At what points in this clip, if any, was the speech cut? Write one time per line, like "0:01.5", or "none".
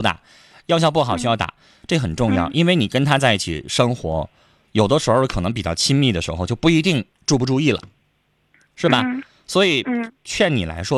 none